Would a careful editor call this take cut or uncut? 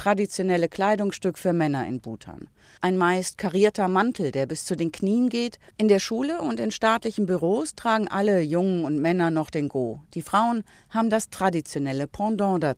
cut